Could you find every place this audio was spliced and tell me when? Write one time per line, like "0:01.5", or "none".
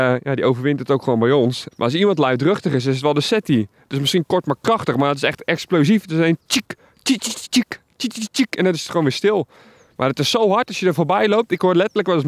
0:01.7